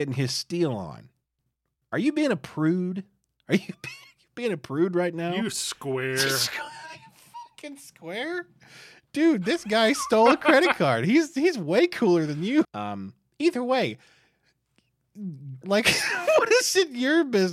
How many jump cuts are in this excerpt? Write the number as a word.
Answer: two